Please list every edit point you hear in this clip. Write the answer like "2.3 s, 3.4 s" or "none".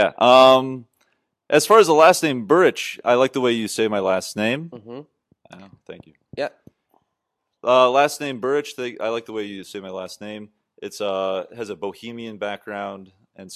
none